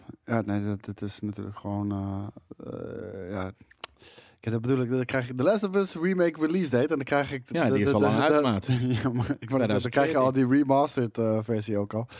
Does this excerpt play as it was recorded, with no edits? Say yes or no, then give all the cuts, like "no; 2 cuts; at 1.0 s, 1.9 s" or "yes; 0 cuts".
yes; 0 cuts